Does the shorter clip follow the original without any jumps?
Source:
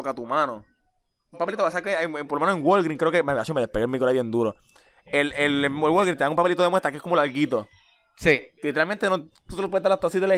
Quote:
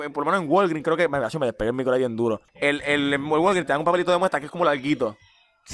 no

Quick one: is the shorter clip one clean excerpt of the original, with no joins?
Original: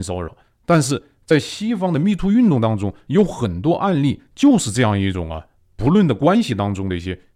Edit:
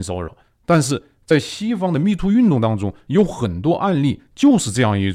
yes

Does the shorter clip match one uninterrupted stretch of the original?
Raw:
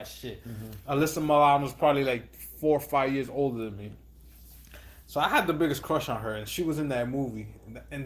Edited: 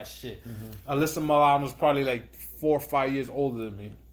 yes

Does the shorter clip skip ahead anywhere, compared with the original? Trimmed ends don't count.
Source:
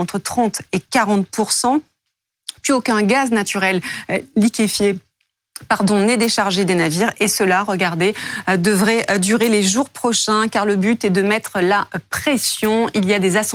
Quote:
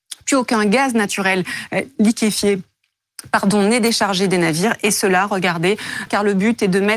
yes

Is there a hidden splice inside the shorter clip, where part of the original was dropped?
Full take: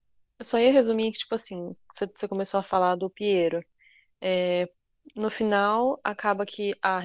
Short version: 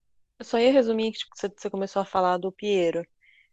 yes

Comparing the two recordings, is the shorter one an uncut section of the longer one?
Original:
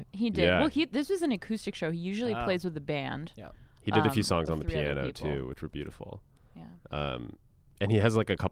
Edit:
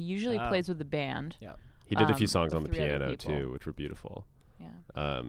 yes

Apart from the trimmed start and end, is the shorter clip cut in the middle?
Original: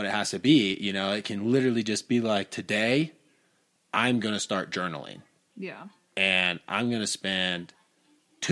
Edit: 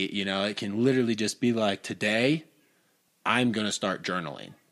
no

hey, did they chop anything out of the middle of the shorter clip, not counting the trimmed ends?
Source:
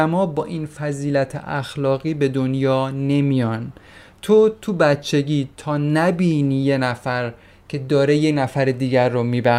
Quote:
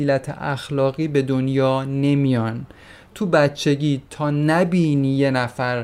yes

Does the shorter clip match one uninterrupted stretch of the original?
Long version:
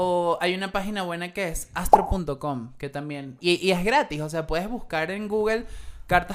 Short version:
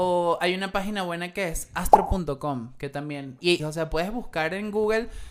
no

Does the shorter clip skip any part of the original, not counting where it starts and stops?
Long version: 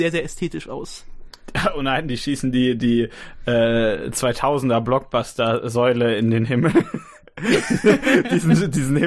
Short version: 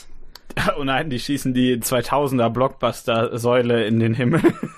yes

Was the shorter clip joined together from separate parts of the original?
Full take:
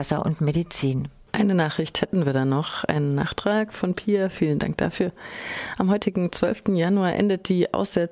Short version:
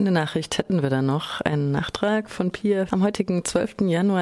yes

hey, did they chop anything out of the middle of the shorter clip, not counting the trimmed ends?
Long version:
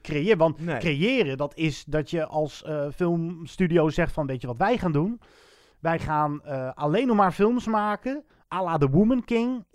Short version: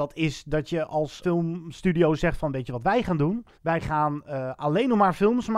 yes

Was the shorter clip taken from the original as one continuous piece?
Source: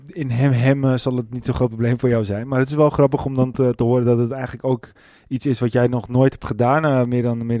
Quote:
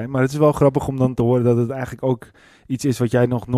no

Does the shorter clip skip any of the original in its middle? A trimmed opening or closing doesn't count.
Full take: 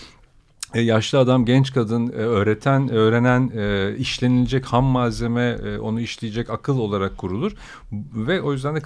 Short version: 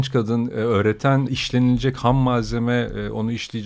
yes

